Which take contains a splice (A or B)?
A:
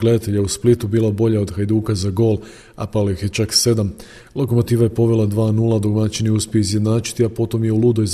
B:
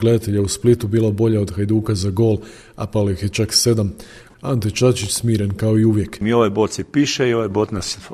B